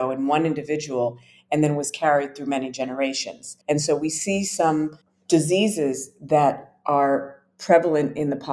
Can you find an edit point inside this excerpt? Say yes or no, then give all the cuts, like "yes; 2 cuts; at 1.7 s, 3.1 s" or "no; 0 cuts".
yes; 1 cut; at 3.6 s